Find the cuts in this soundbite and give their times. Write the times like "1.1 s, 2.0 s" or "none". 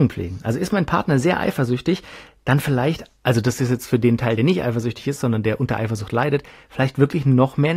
none